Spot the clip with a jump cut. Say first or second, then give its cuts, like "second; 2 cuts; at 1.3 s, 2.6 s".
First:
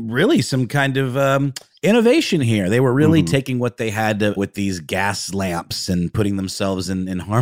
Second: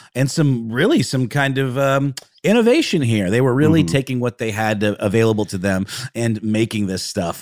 first; 1 cut; at 4.4 s